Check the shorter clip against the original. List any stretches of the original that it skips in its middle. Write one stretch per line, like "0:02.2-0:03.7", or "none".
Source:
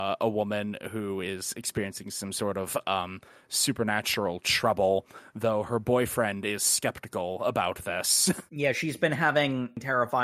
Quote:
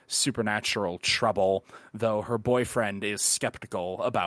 none

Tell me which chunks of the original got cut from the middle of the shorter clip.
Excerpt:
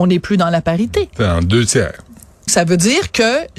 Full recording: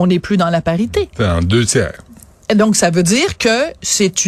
0:02.5-0:02.7

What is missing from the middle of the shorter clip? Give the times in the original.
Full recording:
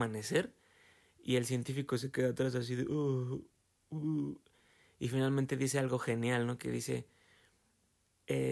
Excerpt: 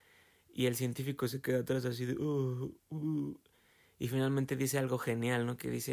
0:03.5-0:03.8

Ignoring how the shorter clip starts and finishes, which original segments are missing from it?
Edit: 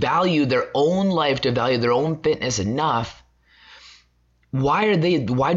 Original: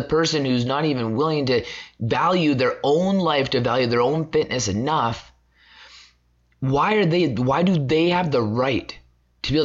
none

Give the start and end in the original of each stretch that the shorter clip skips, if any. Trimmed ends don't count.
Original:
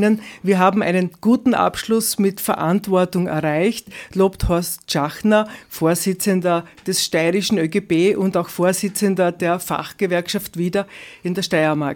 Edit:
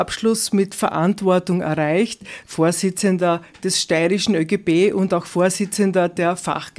0:04.1-0:05.7

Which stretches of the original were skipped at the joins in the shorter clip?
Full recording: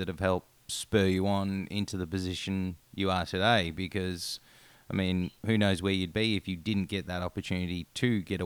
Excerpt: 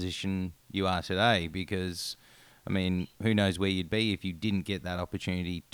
none

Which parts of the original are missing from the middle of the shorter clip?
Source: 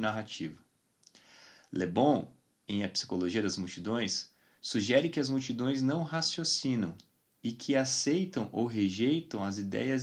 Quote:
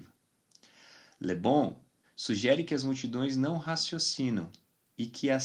0:02.6-0:04.5

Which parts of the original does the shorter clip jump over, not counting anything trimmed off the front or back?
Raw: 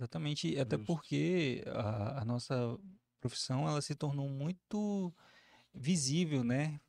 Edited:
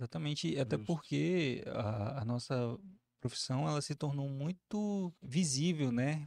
0:05.2-0:05.7

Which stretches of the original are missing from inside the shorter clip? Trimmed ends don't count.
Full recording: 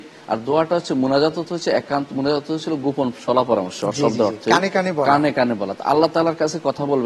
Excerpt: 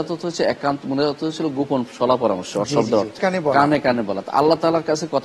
0:04.5-0:04.7

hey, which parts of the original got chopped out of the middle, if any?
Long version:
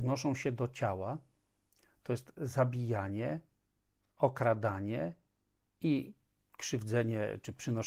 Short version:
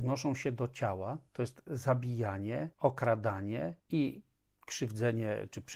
0:01.3-0:02.0
0:03.4-0:04.1
0:05.2-0:05.7

